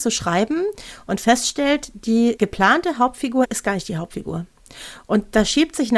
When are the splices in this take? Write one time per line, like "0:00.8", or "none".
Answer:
none